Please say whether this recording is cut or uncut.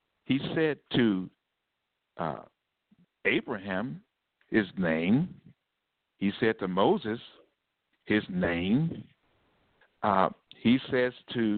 uncut